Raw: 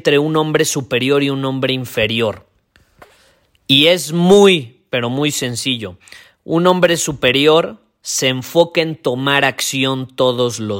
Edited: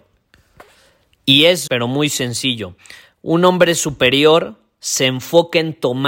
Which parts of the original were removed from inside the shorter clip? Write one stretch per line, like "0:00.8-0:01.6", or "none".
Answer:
0:04.1-0:04.9